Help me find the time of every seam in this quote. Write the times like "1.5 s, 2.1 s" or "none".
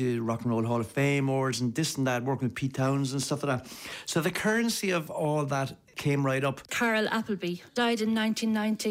5.1 s, 7.7 s